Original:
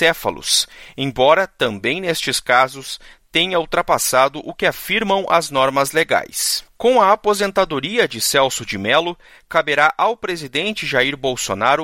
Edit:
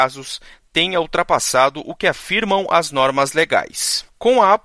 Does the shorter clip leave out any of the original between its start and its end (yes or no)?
no